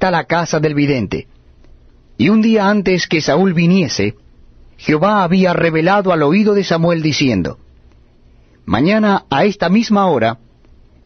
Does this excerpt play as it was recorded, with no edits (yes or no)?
no